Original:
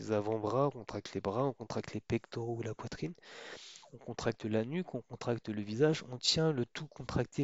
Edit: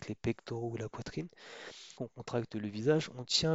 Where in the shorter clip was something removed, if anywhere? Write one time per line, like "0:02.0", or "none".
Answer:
0:02.0